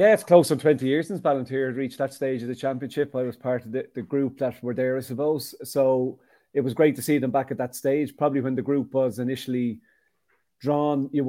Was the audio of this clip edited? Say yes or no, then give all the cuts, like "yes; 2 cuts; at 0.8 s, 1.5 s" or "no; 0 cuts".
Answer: no; 0 cuts